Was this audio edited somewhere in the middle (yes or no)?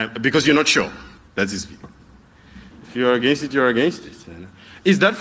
yes